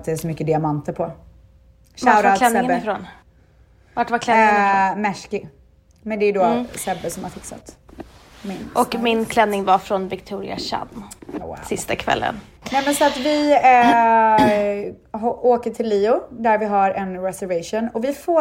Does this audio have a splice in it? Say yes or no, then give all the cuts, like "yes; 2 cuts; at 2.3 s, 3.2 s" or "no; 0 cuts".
yes; 1 cut; at 11.4 s